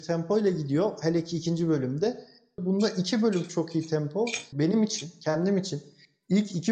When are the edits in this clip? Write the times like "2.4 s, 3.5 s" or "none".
2.6 s, 4.5 s